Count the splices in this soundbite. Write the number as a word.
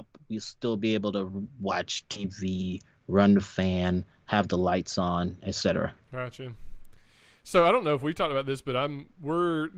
zero